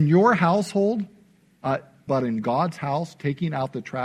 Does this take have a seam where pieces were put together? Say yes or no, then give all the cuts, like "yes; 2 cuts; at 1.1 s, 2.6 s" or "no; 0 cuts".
yes; 1 cut; at 2.1 s